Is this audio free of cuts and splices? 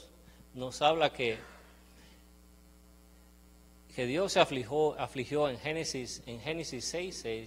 yes; 0 cuts

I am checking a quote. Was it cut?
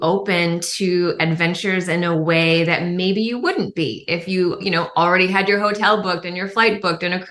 no; 0 cuts

